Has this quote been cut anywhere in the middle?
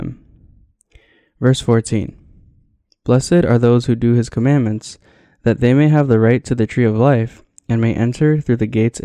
no; 0 cuts

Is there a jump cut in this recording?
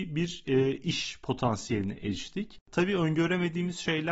yes; 1 cut; at 2.6 s

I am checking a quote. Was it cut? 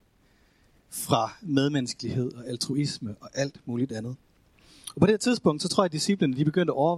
no; 0 cuts

